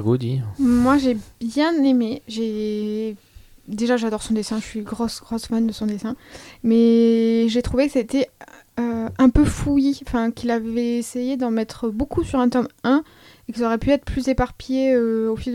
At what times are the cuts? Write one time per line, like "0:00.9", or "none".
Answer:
none